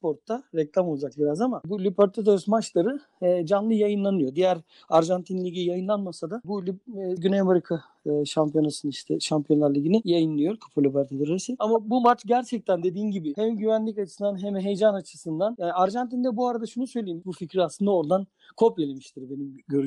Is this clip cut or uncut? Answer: cut